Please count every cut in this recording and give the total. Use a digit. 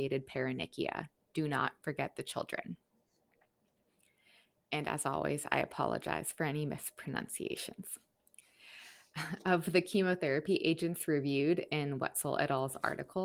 0